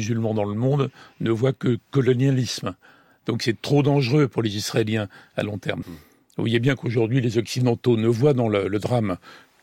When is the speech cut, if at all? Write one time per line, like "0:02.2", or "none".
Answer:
0:05.8